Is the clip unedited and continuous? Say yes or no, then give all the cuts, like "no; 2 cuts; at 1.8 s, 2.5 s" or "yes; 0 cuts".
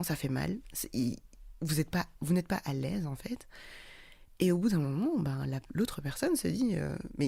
yes; 0 cuts